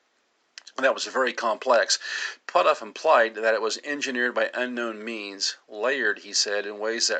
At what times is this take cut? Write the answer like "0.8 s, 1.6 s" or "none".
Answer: none